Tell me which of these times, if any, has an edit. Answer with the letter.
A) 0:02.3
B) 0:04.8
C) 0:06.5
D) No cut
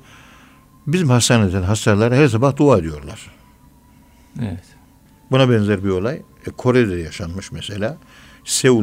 D